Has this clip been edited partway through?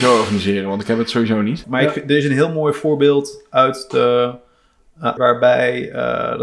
yes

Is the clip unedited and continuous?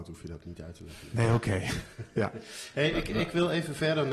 yes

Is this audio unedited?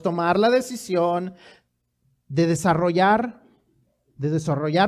yes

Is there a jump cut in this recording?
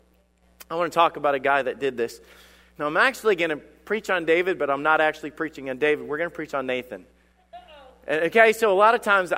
no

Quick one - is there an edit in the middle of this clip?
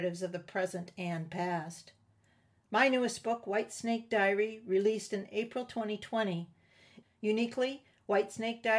yes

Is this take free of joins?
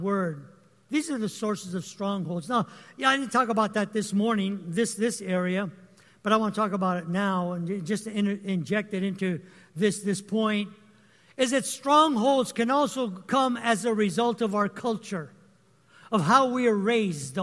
yes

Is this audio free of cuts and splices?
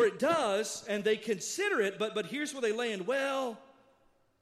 yes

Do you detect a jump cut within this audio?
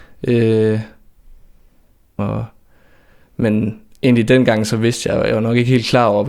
yes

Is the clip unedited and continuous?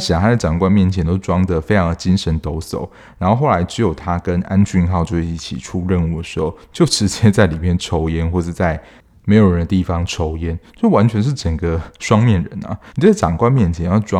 no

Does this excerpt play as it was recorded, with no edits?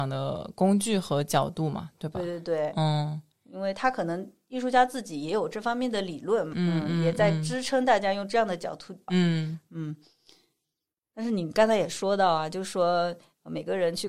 no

